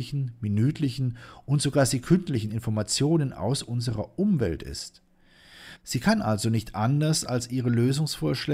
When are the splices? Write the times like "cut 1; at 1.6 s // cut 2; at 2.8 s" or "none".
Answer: cut 1; at 5.8 s